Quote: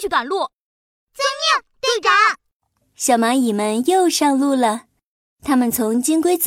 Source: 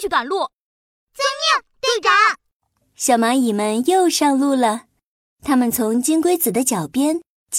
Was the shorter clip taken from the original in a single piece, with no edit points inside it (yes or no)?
yes